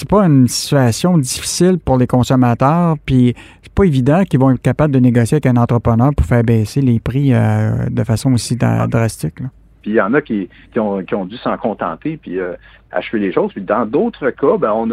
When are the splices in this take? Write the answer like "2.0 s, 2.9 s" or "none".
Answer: 9.8 s